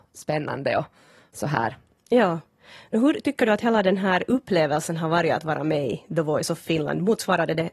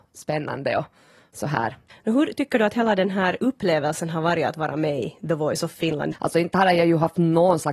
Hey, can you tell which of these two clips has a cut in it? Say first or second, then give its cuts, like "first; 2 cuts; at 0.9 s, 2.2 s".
second; 2 cuts; at 1.9 s, 6.1 s